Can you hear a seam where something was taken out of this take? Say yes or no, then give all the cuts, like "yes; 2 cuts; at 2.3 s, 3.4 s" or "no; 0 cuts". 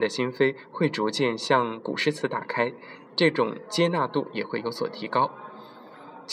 yes; 1 cut; at 3.0 s